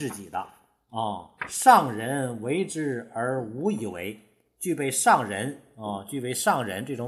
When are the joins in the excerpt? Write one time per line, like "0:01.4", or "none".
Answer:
0:01.4